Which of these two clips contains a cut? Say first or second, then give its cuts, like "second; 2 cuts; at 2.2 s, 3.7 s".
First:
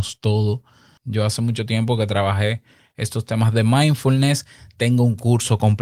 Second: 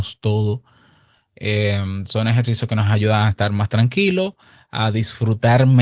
first; 1 cut; at 1.0 s